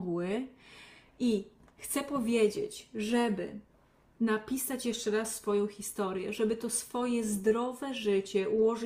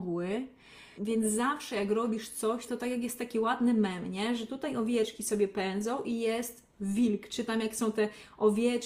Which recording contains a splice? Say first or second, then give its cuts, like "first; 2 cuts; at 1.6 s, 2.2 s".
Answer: second; 2 cuts; at 1.0 s, 2.7 s